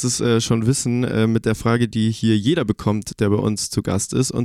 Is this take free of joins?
yes; 0 cuts

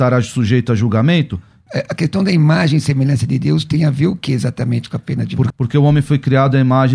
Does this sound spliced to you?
yes; 2 cuts; at 1.7 s, 5.5 s

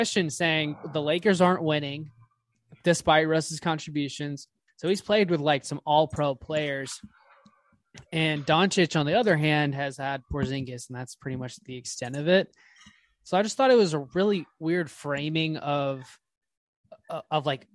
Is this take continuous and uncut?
no; 1 cut; at 4.7 s

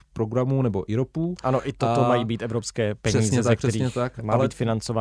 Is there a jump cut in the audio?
no; 0 cuts

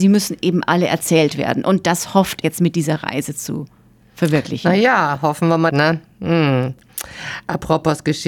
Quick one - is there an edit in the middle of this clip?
yes; 2 cuts; at 2.4 s, 5.7 s

